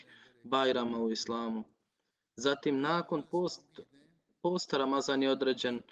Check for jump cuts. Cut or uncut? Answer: uncut